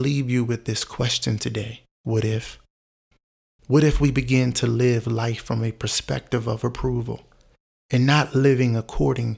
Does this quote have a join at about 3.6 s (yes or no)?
no